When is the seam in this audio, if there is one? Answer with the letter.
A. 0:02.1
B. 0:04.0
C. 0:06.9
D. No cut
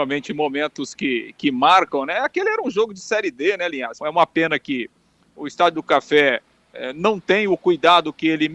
B